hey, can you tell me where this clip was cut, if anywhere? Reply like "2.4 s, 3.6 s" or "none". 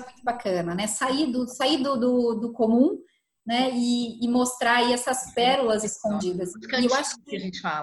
none